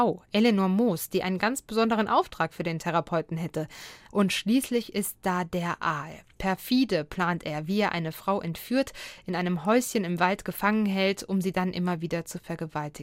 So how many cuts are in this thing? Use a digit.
1